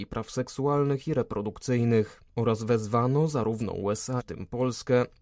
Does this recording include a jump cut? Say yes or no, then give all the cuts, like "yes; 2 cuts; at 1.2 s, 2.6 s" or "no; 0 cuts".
yes; 1 cut; at 4.2 s